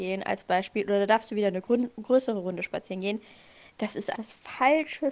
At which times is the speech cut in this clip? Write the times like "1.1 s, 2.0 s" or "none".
4.1 s